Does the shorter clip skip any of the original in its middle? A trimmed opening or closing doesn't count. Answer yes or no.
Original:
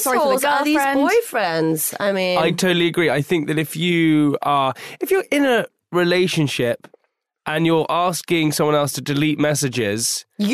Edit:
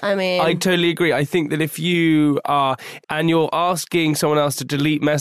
yes